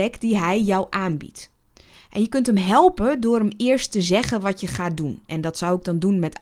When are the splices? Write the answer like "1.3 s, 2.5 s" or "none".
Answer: none